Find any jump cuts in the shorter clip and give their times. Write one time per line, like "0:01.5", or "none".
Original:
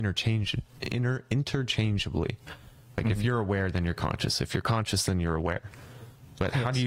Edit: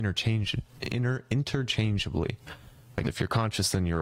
0:03.0